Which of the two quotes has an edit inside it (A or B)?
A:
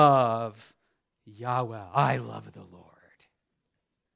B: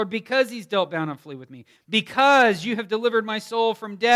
B